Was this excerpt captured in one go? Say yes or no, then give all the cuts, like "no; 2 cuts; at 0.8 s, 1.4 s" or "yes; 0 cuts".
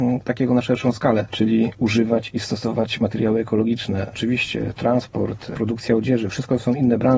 yes; 0 cuts